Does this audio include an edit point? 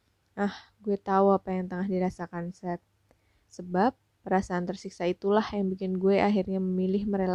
yes; 1 cut; at 3.4 s

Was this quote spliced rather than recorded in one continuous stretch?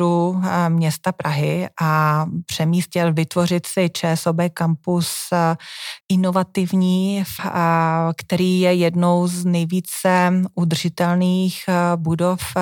yes; 2 cuts; at 6.0 s, 7.4 s

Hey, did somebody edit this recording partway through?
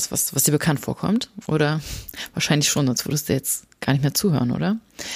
no; 0 cuts

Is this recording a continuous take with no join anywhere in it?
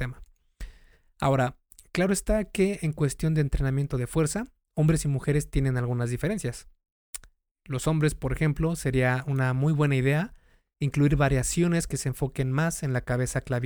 yes; 0 cuts

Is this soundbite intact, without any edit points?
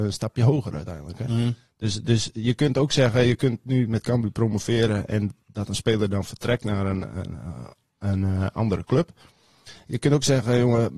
yes; 0 cuts

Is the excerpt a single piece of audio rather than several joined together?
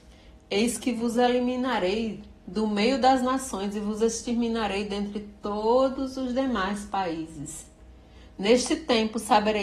yes; 0 cuts

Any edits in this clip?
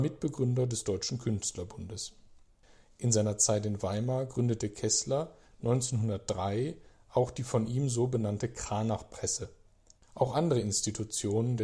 yes; 1 cut; at 10.0 s

